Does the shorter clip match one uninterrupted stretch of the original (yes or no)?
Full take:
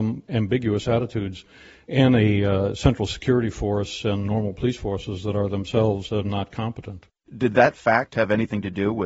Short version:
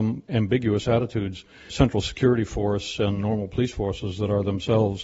no